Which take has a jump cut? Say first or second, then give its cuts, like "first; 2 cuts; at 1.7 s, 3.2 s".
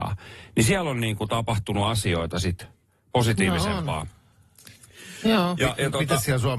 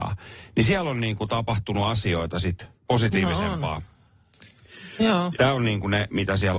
second; 2 cuts; at 2.7 s, 5.3 s